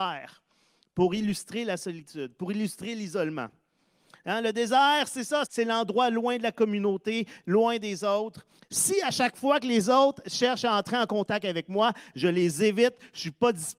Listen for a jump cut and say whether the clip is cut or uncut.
cut